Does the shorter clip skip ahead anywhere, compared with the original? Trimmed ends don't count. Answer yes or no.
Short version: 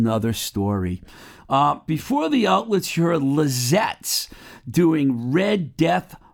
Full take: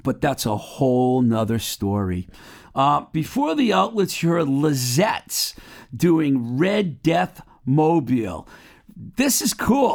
no